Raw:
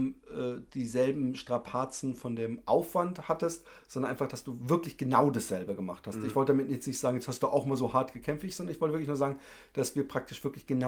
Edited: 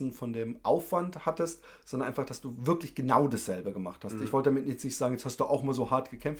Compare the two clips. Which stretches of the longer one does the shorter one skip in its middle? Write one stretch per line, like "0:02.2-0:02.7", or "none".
none